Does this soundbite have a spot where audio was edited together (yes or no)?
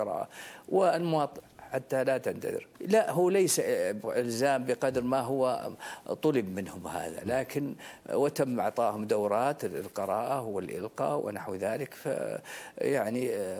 yes